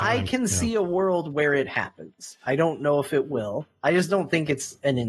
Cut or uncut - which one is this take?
uncut